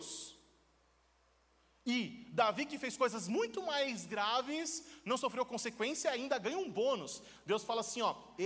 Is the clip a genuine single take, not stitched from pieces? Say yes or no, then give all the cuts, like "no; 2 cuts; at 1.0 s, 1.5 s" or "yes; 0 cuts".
yes; 0 cuts